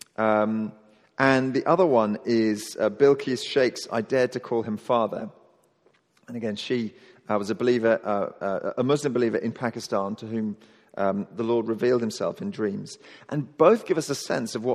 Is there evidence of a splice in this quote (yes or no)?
no